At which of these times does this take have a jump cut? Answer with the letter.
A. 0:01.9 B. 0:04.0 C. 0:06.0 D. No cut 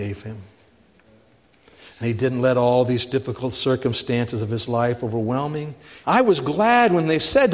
C